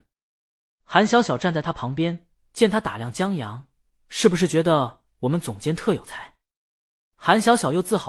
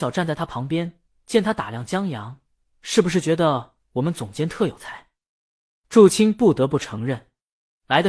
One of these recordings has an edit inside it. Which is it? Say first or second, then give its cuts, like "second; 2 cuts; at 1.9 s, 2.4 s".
first; 1 cut; at 7.1 s